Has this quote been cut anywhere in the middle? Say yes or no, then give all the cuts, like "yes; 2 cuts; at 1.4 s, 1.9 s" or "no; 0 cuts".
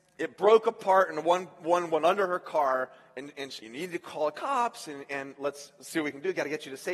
yes; 1 cut; at 3.6 s